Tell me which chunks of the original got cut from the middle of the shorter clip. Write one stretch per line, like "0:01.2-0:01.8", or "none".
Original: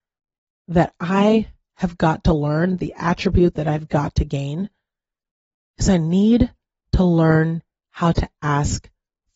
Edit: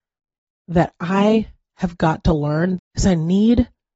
0:02.8-0:05.6